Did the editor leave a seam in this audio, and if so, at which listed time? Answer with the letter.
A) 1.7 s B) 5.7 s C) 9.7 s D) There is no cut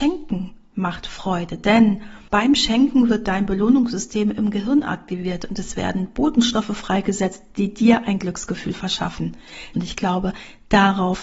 C